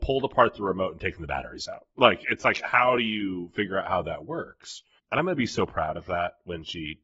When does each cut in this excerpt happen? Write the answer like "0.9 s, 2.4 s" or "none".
none